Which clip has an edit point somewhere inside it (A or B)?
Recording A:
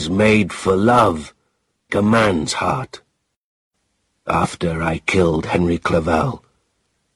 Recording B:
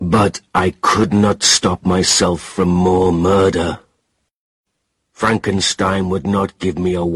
A